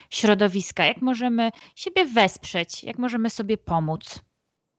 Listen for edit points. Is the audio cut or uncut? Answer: uncut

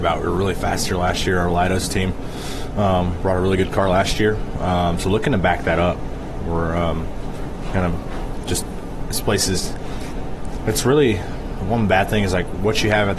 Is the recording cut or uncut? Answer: uncut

